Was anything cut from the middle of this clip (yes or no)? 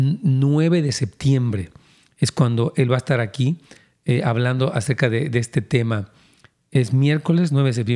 no